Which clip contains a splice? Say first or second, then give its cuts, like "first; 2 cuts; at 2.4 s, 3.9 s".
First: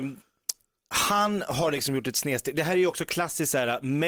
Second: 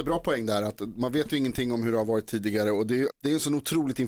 second; 1 cut; at 3.1 s